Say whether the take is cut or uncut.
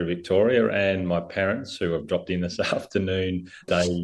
uncut